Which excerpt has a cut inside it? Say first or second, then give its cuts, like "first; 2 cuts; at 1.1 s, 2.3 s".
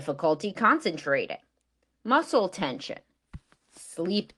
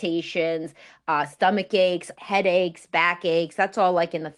second; 1 cut; at 2.1 s